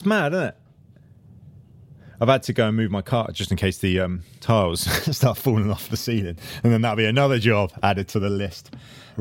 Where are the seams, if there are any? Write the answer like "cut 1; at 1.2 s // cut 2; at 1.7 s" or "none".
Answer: none